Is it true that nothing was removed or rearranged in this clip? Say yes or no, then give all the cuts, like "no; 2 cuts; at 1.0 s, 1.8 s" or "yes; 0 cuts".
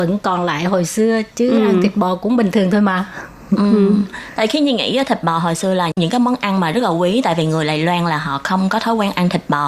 yes; 0 cuts